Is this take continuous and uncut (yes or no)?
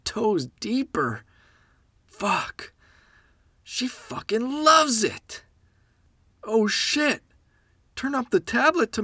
yes